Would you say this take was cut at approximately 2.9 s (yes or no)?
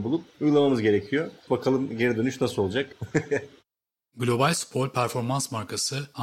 yes